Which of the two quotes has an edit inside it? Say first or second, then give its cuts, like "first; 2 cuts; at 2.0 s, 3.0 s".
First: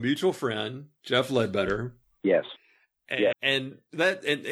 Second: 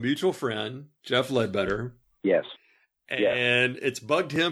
first; 1 cut; at 3.3 s